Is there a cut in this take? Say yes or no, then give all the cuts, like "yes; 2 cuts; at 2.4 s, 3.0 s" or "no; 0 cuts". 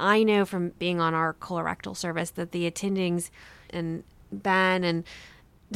yes; 1 cut; at 3.7 s